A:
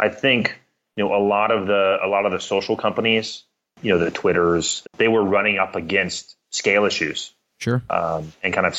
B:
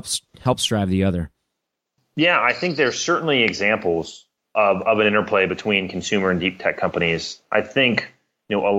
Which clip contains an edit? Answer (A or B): A